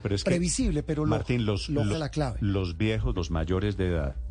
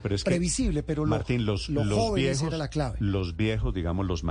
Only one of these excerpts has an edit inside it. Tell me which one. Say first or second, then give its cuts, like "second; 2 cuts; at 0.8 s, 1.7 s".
first; 2 cuts; at 1.9 s, 3.2 s